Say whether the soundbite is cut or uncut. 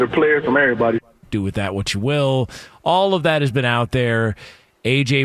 cut